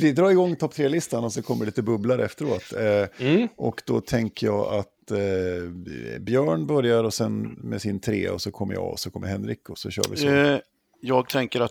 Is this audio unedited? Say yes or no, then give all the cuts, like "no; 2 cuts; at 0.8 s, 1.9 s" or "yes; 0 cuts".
yes; 0 cuts